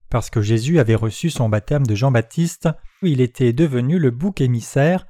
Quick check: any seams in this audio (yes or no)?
yes